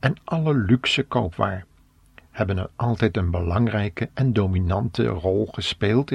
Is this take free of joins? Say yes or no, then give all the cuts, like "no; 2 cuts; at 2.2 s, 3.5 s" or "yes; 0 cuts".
yes; 0 cuts